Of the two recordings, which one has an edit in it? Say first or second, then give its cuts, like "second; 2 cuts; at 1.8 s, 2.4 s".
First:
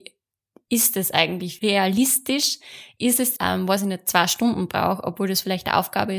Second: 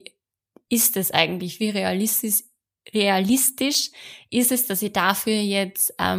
first; 2 cuts; at 1.6 s, 3.4 s